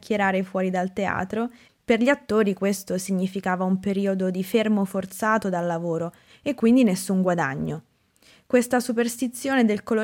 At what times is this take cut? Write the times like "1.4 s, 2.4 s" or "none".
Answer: 1.7 s